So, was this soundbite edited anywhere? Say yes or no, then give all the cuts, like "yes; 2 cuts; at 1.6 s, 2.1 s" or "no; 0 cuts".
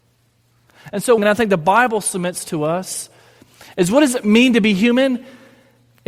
yes; 1 cut; at 1.2 s